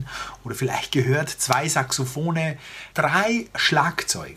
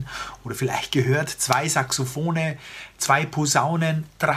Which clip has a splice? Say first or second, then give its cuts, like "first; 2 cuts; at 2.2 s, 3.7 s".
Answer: first; 1 cut; at 2.9 s